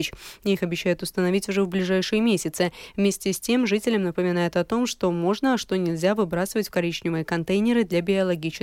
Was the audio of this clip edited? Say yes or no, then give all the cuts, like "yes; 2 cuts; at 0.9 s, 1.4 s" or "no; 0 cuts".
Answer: no; 0 cuts